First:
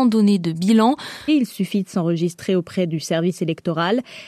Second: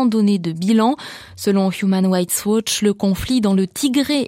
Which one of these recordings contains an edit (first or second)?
first